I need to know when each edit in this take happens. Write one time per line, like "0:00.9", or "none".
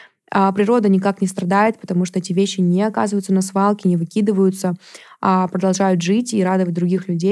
none